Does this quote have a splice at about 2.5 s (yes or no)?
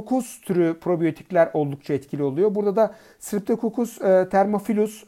no